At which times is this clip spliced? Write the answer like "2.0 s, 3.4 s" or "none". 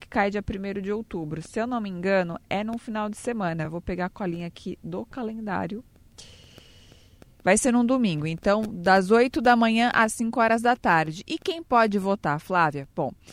none